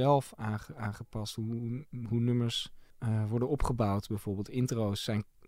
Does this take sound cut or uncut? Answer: cut